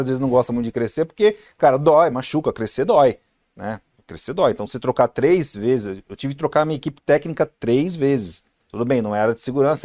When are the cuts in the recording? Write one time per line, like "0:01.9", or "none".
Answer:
0:08.6

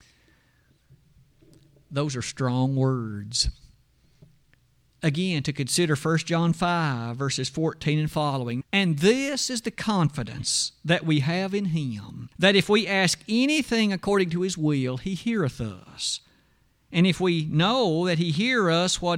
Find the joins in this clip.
0:08.6
0:12.3

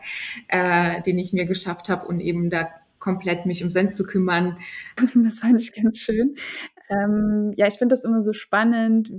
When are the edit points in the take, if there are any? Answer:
0:05.0

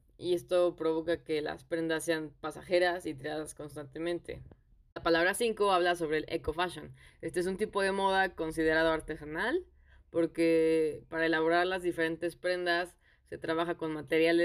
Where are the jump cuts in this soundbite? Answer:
none

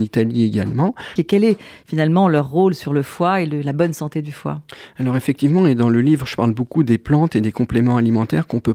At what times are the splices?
0:01.2

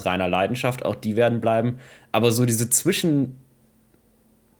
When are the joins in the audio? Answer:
none

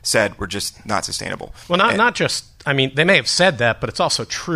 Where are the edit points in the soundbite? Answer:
none

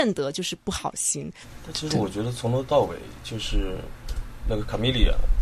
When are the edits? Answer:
none

